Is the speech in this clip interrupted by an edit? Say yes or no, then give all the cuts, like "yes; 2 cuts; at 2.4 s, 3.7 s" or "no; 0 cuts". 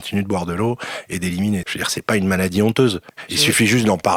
yes; 1 cut; at 1.6 s